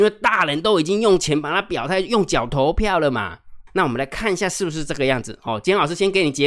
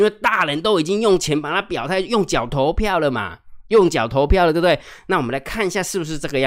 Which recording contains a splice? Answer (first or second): first